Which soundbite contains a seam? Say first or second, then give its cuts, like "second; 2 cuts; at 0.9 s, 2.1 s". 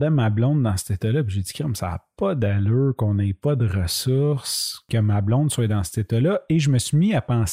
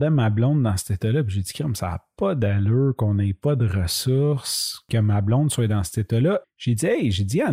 second; 1 cut; at 6.4 s